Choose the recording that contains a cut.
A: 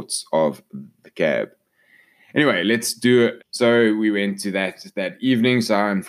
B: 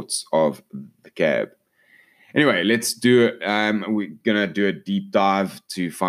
A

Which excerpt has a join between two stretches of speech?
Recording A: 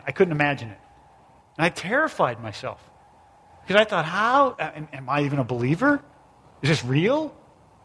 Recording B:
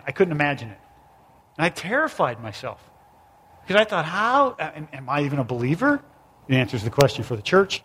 B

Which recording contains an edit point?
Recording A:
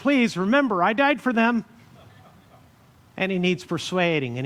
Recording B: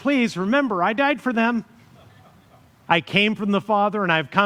B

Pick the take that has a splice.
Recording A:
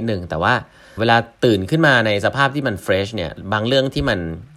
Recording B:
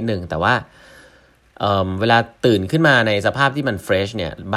A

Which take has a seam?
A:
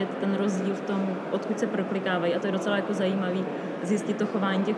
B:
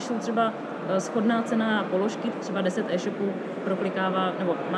B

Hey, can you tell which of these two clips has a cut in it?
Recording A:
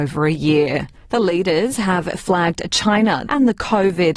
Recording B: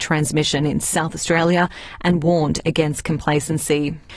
A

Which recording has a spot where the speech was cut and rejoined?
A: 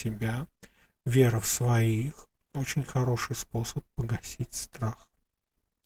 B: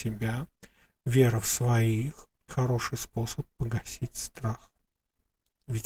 B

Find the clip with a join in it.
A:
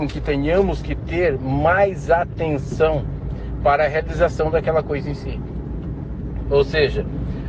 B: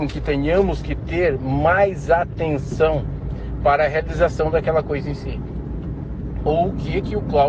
B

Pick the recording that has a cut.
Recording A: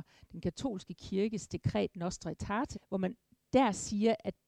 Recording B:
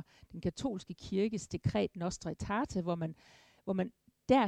A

